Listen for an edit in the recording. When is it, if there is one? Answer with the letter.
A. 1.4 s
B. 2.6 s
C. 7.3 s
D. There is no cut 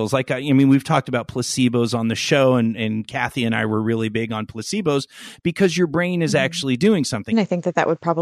C